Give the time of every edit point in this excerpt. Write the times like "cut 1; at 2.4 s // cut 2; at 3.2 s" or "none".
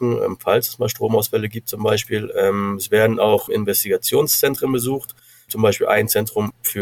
cut 1; at 3.5 s